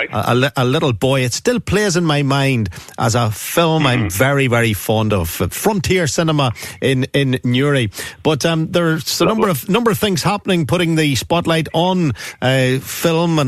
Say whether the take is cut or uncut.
uncut